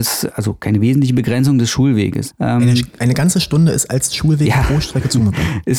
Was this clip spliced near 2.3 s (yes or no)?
yes